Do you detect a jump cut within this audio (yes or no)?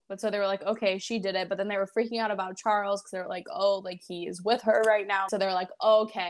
yes